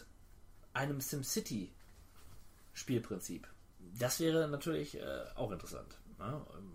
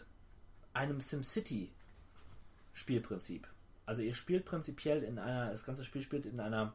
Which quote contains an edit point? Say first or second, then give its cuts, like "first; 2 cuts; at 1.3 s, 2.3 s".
first; 1 cut; at 3.7 s